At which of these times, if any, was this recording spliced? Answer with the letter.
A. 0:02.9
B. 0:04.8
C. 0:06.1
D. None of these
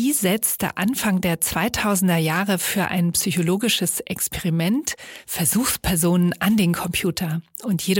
D